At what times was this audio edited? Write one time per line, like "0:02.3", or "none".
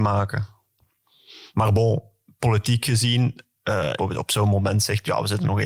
0:04.0